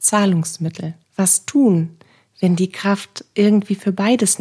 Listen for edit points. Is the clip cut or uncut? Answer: cut